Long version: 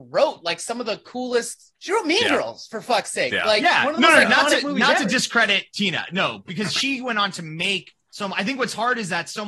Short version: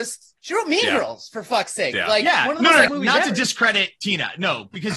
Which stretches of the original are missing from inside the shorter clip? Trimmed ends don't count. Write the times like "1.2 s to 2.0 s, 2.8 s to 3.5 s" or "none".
4.3 s to 4.6 s